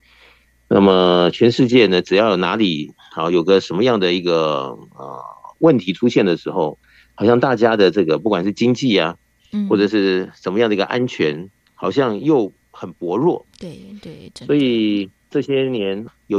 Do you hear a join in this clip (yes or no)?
no